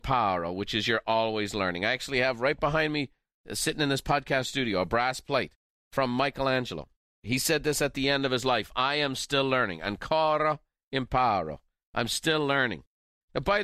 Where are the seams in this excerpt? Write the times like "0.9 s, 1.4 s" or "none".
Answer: none